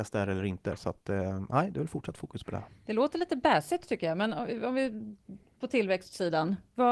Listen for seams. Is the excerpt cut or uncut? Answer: uncut